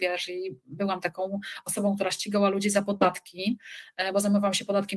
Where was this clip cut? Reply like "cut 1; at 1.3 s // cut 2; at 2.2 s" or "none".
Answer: none